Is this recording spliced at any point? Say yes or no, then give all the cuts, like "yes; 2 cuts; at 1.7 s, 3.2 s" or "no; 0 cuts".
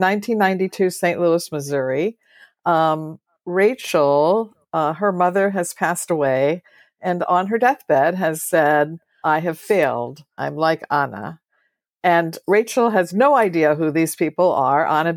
yes; 2 cuts; at 9.2 s, 10.4 s